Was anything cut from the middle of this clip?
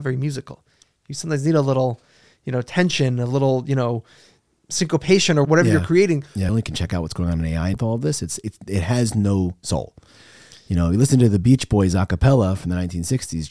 yes; 3 cuts; at 5.4 s, 6.5 s, 7.7 s

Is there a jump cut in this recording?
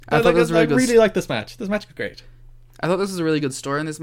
no; 0 cuts

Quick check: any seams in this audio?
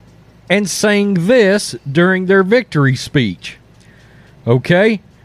no; 0 cuts

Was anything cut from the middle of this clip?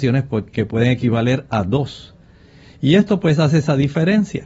no; 0 cuts

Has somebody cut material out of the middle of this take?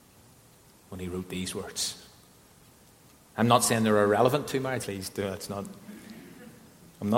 yes; 1 cut; at 4.8 s

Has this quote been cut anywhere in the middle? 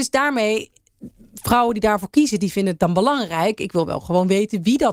no; 0 cuts

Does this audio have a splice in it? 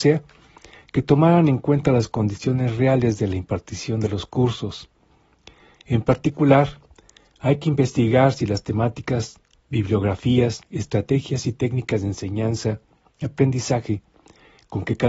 no; 0 cuts

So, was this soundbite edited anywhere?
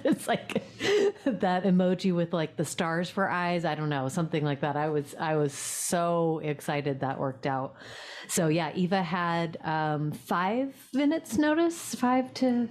yes; 1 cut; at 1.6 s

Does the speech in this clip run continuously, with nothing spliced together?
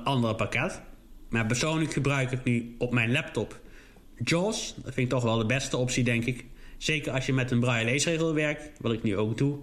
yes; 0 cuts

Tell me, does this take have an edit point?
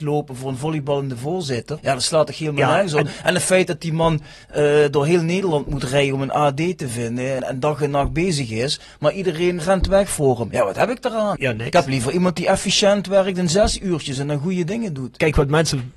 no; 0 cuts

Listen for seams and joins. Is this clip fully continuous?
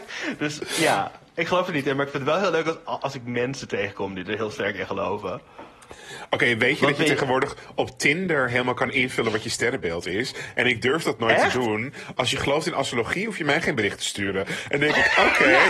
no; 1 cut; at 12.1 s

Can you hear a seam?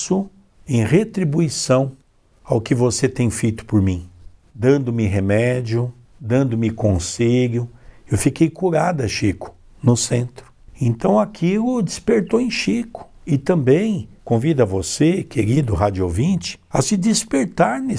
no; 0 cuts

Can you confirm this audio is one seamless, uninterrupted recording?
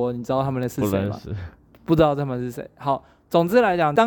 yes; 0 cuts

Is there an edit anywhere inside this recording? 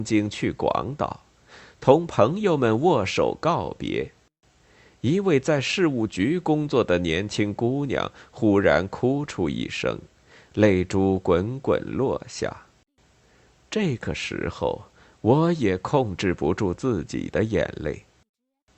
no; 0 cuts

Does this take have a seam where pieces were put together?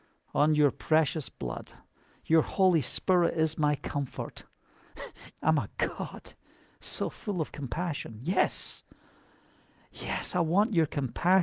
yes; 1 cut; at 5.3 s

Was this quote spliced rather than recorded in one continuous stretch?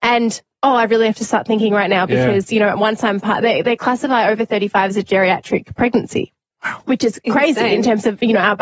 no; 0 cuts

